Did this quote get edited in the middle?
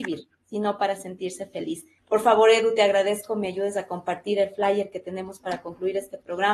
yes; 1 cut; at 2.0 s

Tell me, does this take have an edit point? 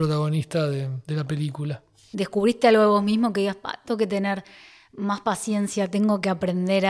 no; 0 cuts

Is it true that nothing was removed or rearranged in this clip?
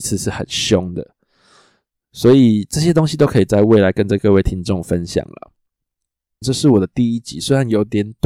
no; 1 cut; at 6.4 s

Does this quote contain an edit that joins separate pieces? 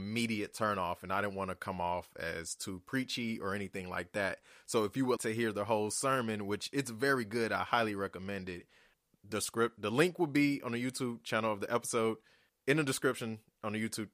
yes; 1 cut; at 5.2 s

